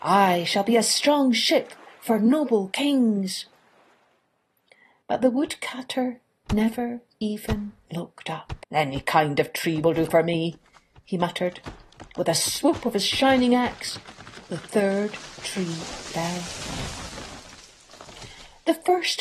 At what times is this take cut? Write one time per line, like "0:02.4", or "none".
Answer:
0:05.0
0:08.6